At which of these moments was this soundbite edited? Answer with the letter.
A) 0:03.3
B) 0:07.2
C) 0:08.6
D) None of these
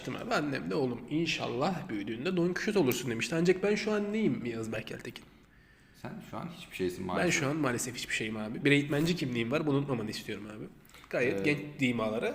C